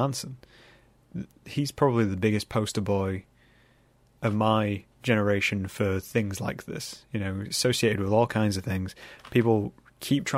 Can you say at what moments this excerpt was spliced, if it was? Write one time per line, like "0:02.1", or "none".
none